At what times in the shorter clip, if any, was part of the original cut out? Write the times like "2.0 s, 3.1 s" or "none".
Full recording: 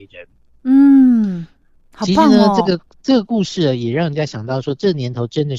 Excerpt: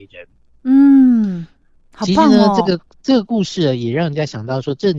none